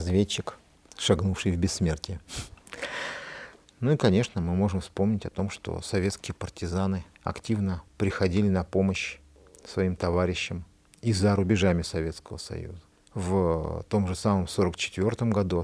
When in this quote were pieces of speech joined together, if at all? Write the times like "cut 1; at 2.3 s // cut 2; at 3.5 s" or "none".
cut 1; at 3.6 s